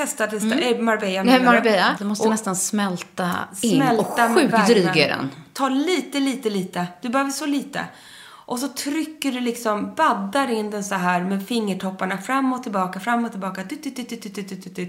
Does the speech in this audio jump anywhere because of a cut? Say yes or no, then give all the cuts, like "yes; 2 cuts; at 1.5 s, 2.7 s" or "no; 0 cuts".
yes; 1 cut; at 2.0 s